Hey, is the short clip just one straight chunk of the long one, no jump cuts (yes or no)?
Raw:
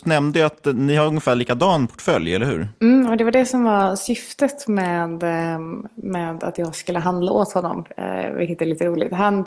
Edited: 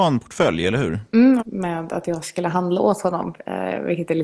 no